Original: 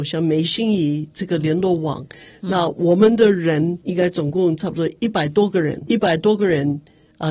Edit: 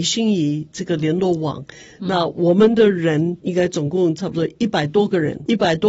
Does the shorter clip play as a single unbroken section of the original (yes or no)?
yes